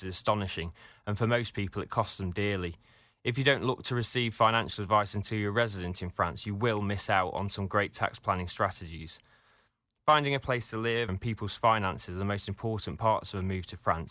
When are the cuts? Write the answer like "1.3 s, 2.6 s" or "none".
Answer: 11.1 s